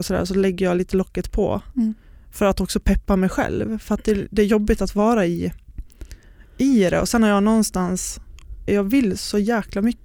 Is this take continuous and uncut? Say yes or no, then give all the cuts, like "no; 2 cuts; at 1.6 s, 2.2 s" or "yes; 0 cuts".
no; 1 cut; at 8.7 s